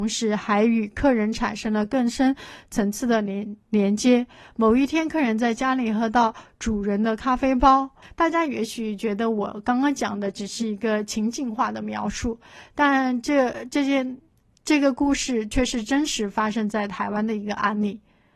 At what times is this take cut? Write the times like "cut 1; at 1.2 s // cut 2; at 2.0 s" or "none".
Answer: cut 1; at 8.0 s

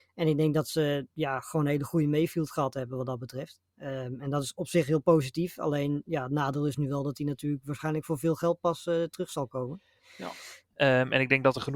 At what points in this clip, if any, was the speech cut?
cut 1; at 10.7 s

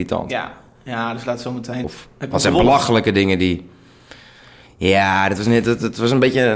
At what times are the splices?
cut 1; at 1.8 s

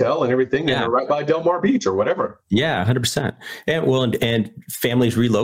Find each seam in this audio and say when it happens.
none

